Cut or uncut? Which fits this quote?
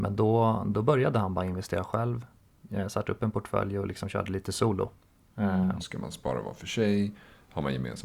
cut